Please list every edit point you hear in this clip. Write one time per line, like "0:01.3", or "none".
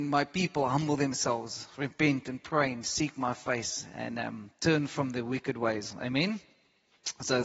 none

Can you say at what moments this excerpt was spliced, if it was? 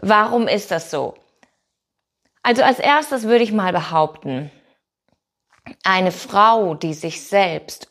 none

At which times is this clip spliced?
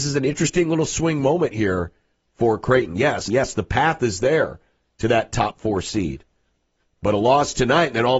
0:03.3

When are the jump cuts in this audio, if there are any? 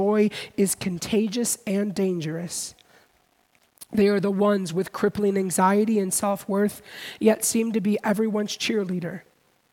none

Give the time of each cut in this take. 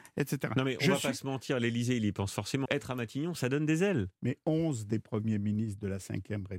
0:02.6

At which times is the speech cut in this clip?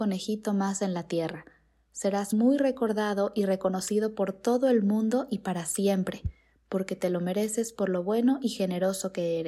none

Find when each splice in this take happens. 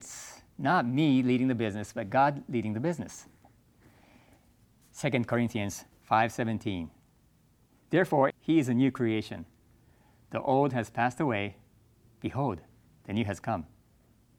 0:04.8
0:08.3

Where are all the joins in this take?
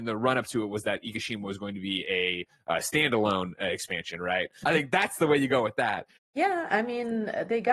0:04.6
0:06.2

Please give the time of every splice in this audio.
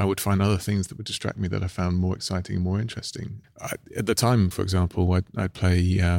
0:03.4
0:04.5

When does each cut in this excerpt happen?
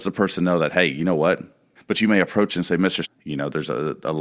0:01.8
0:03.0

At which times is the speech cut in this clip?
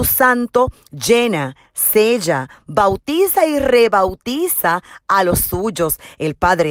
none

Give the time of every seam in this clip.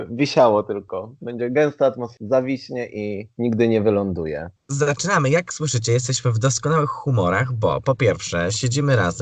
none

